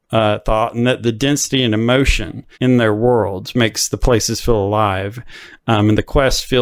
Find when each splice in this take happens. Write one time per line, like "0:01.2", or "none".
0:02.5

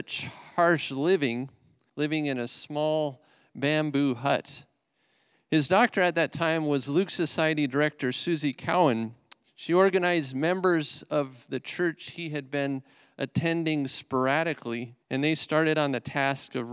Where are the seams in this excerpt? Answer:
0:01.9
0:05.3
0:15.0

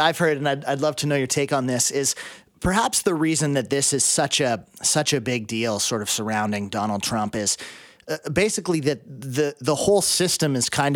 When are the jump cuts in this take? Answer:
none

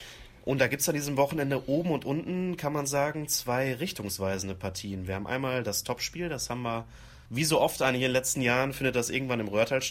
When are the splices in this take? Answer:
0:07.3

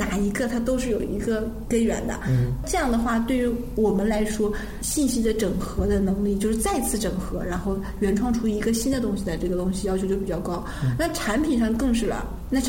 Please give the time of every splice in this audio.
none

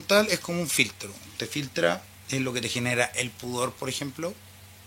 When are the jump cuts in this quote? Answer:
none

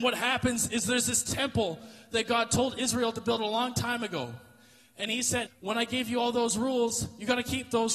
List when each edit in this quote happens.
0:05.5

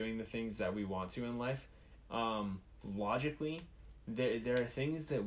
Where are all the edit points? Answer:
0:02.0

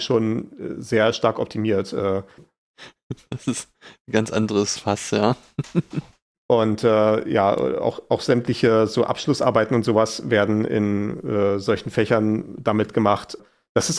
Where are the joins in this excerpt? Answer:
0:02.4

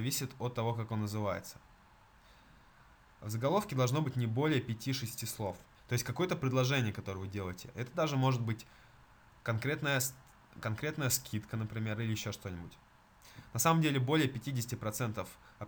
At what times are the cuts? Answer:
0:05.7

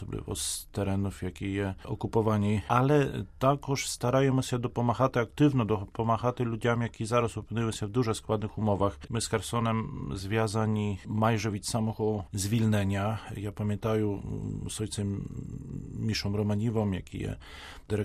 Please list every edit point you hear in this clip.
0:09.1

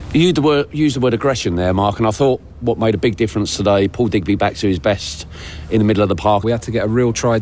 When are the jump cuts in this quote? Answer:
0:06.4

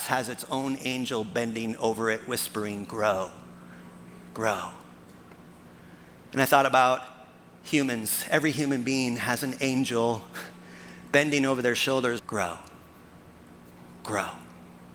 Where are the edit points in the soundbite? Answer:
0:12.2

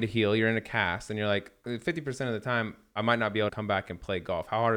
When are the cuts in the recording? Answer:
0:01.6
0:03.5

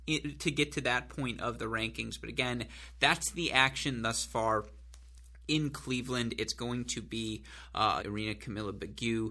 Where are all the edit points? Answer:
0:08.0

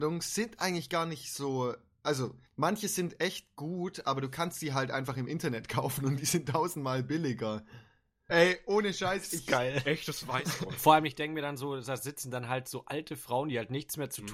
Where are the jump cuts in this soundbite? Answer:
0:02.5
0:08.3

